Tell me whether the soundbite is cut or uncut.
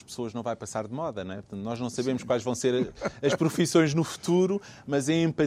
uncut